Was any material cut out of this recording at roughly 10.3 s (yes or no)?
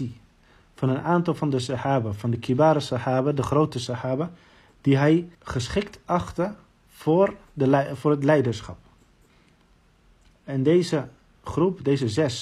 no